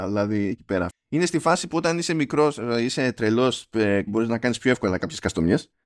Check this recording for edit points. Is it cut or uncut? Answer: cut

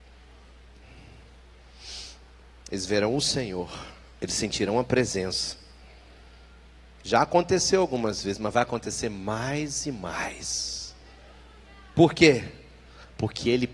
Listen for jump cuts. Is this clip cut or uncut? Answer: cut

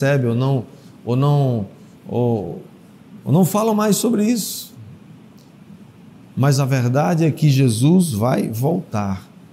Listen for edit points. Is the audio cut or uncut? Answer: uncut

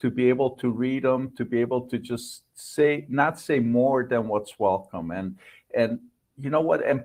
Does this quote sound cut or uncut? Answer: uncut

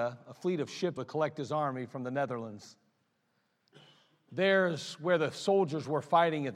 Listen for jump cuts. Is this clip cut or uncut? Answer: cut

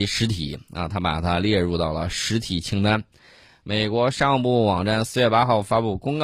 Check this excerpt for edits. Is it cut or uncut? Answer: uncut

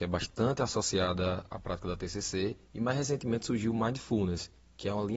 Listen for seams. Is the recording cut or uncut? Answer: cut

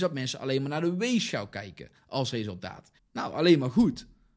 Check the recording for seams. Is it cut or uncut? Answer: cut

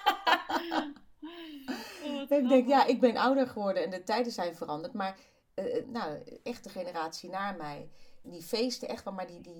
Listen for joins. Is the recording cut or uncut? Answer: cut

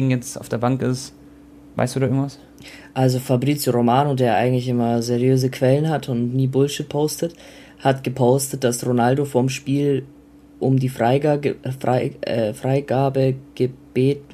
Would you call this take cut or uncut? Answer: uncut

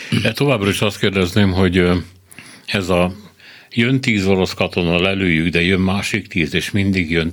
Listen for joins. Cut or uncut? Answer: uncut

